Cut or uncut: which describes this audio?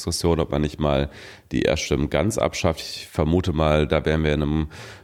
uncut